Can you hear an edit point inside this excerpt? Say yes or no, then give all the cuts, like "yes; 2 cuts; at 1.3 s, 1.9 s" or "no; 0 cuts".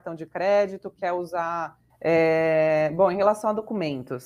yes; 1 cut; at 1.9 s